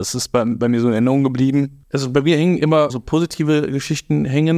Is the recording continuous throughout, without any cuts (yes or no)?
no